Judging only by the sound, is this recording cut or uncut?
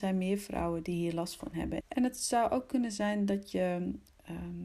cut